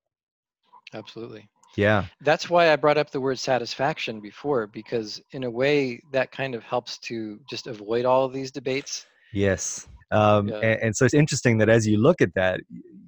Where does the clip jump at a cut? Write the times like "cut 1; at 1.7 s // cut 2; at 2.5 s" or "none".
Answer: cut 1; at 10.0 s // cut 2; at 11.1 s